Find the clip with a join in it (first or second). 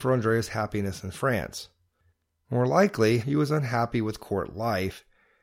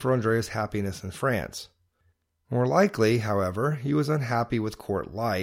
first